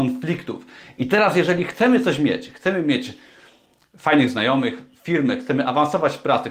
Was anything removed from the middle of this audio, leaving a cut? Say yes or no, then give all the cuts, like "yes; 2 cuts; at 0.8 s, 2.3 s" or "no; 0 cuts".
no; 0 cuts